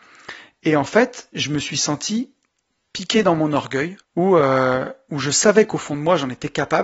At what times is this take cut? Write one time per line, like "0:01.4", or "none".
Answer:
0:04.0